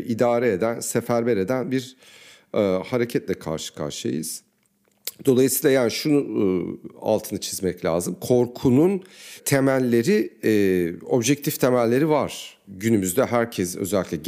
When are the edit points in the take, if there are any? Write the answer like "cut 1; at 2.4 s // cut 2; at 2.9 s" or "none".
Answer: none